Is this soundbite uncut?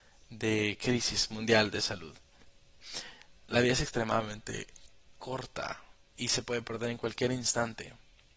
yes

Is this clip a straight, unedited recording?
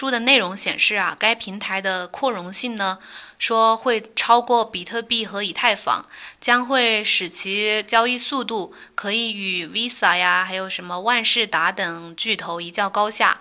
yes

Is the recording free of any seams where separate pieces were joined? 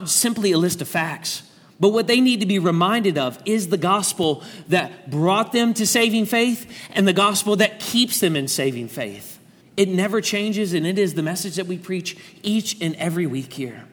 no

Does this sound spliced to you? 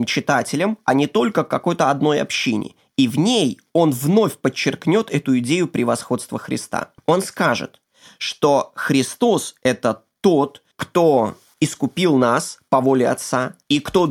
no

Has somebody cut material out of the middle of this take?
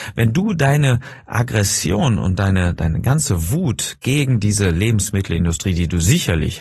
no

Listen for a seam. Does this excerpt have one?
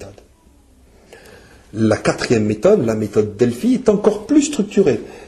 no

